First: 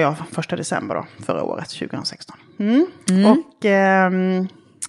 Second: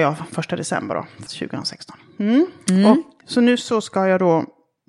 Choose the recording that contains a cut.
second; 2 cuts; at 1.3 s, 3.2 s

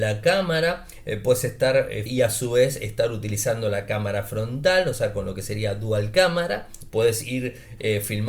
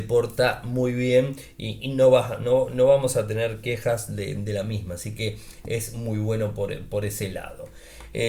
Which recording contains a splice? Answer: first; 2 cuts; at 2.1 s, 6.9 s

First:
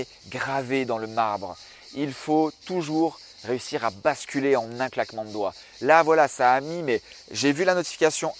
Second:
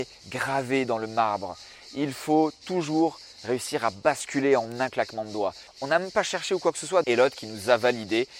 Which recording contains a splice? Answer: second; 2 cuts; at 5.7 s, 7.0 s

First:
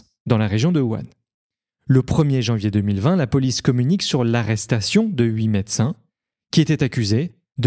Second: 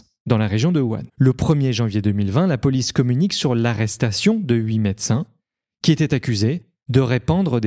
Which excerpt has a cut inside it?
second; 1 cut; at 1.1 s

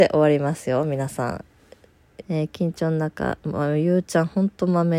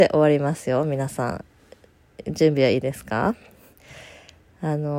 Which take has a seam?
first; 2 cuts; at 2.2 s, 3.4 s

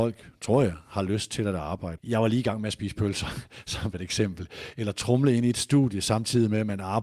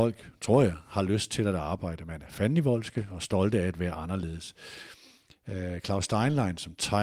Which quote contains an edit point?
first; 1 cut; at 2.0 s

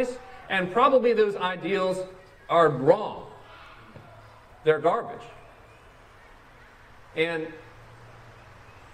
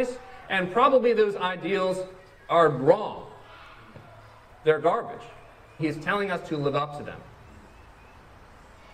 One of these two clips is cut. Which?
second; 1 cut; at 5.8 s

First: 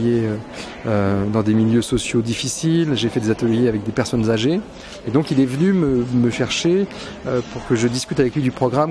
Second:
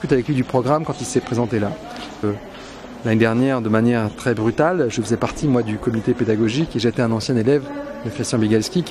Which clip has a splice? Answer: second; 1 cut; at 2.2 s

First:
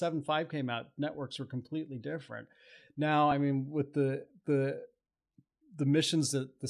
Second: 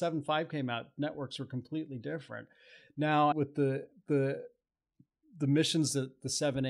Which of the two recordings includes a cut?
second; 1 cut; at 3.3 s

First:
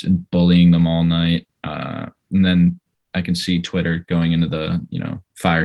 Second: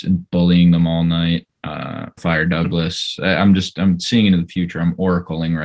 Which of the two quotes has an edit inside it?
second; 1 cut; at 2.2 s

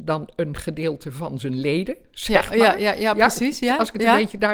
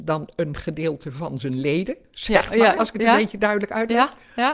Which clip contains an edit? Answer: second; 1 cut; at 2.8 s

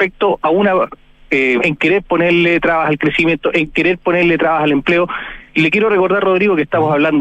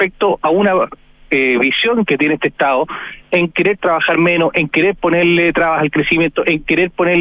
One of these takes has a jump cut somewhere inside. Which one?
first; 1 cut; at 1.6 s

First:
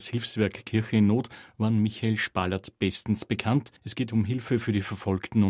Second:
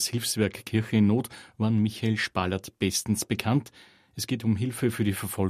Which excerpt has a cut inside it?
first; 1 cut; at 3.8 s

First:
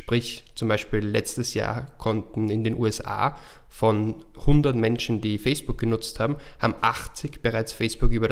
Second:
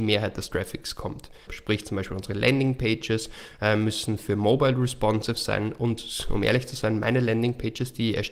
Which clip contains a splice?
second; 1 cut; at 1.5 s

